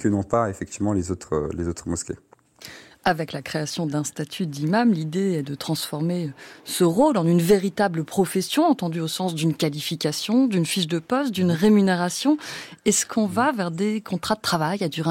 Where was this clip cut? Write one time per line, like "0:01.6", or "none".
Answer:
none